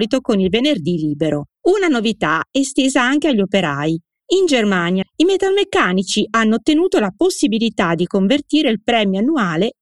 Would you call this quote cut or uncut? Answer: cut